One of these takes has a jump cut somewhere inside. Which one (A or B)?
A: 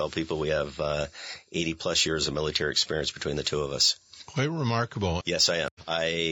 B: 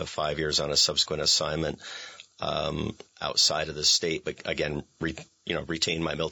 A